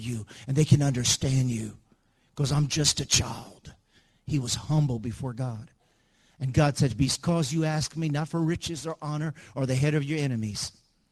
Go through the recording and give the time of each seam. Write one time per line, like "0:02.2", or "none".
none